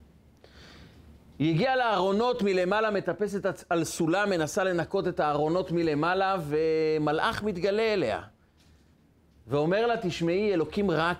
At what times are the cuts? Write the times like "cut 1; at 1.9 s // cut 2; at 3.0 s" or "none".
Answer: none